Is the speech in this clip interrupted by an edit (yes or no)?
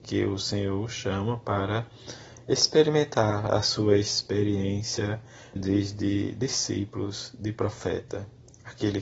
yes